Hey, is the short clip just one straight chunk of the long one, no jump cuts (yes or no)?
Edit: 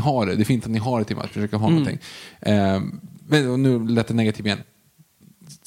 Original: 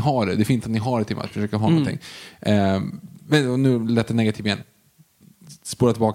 yes